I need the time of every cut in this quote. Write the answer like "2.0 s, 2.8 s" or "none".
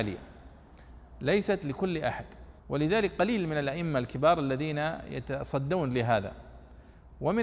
2.6 s